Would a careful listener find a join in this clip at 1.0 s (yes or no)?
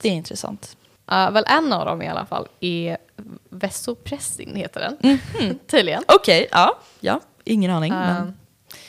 yes